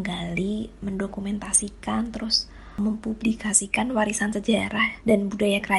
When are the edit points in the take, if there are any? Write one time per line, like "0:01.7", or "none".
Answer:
none